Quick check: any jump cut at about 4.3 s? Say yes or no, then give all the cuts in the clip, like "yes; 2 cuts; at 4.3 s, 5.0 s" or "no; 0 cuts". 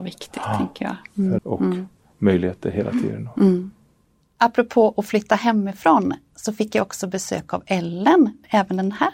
no; 1 cut; at 1.4 s